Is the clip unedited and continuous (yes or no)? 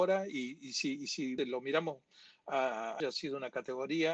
no